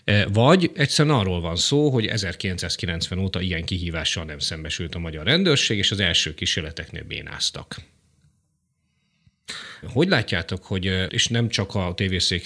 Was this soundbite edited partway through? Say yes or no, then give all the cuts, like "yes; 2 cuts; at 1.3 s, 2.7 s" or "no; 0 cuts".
yes; 2 cuts; at 9.8 s, 11.1 s